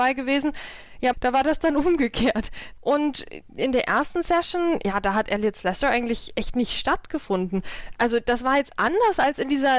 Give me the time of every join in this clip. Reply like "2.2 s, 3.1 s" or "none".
1.1 s, 2.8 s